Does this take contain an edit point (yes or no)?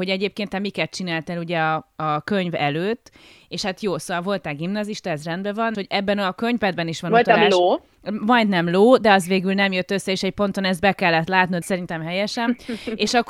yes